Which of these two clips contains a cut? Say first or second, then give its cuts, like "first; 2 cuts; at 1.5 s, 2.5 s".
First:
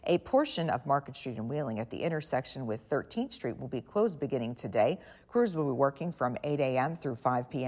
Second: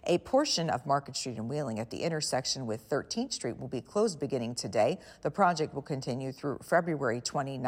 first; 1 cut; at 5.1 s